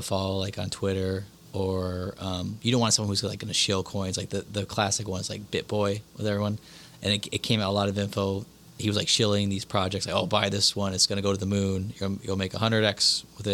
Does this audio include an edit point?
no; 0 cuts

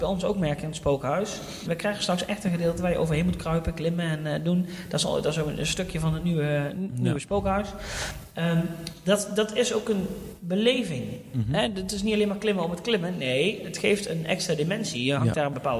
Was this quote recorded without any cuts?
no; 1 cut; at 1.7 s

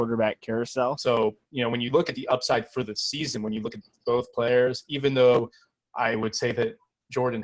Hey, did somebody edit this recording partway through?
yes; 1 cut; at 1.0 s

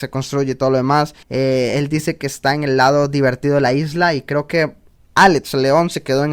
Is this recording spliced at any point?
yes; 1 cut; at 1.2 s

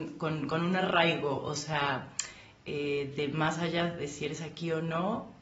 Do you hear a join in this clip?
no; 0 cuts

